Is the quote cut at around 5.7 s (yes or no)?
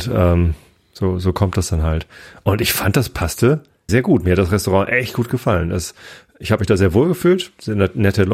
no